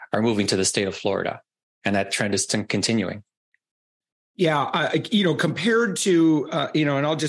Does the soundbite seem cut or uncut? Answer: uncut